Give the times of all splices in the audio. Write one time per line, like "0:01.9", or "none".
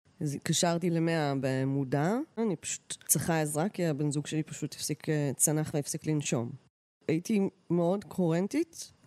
0:02.4